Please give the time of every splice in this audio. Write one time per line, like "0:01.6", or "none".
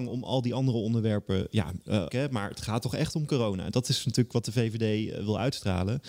0:02.1

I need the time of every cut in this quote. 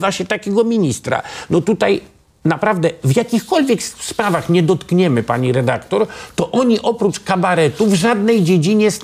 none

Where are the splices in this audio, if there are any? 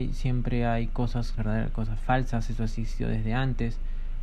0:01.4

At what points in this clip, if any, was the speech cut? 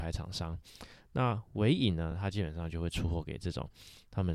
none

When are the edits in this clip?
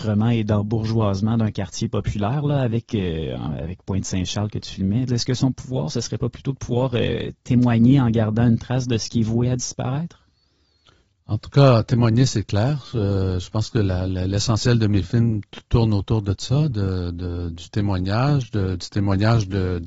0:05.1

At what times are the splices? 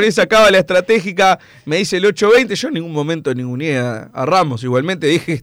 none

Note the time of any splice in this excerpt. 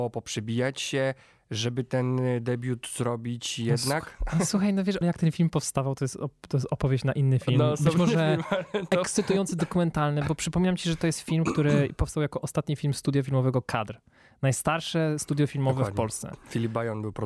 0:05.0

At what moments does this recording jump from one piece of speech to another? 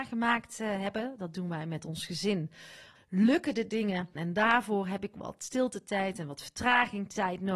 0:03.0
0:04.2

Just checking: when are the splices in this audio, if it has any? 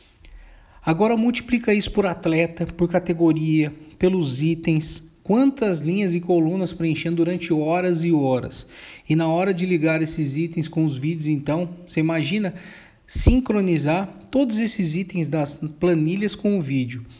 none

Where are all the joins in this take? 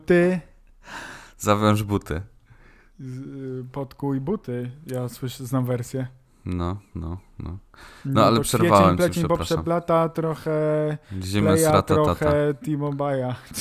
none

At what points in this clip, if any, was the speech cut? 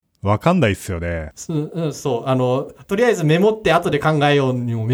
0:01.3
0:02.8

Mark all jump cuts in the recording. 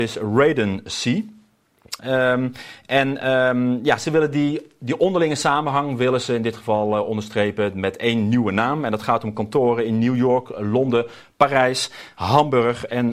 0:02.0

